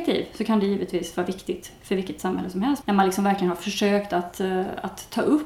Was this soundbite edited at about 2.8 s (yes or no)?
yes